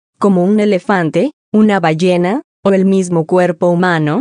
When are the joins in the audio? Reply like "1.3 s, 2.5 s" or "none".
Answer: none